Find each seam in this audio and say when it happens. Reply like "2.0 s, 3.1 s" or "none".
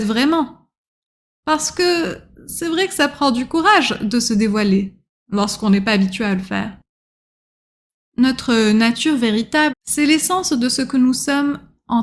8.0 s, 9.7 s